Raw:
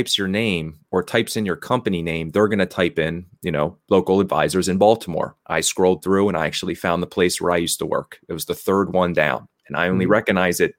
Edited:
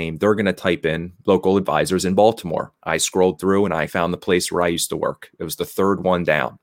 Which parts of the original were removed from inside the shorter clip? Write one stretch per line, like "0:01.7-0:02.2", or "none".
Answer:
0:03.4-0:03.9
0:06.5-0:06.8